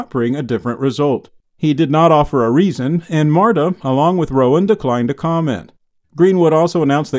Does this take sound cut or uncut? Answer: cut